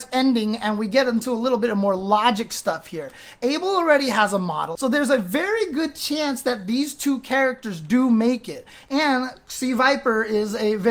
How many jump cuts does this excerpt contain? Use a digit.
1